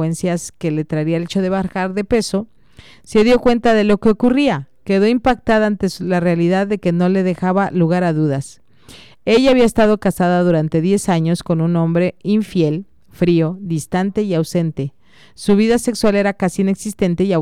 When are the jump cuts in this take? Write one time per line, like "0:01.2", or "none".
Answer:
none